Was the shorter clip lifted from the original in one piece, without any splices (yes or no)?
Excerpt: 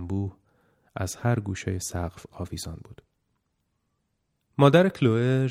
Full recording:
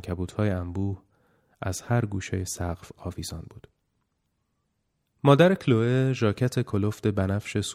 yes